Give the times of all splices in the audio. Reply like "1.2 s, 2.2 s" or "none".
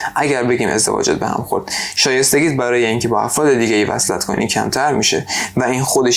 none